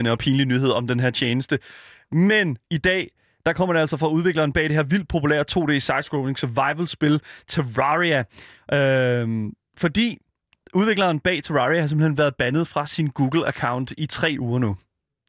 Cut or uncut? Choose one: uncut